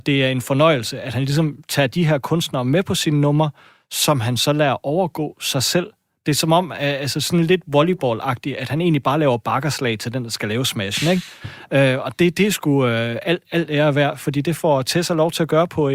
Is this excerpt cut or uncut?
uncut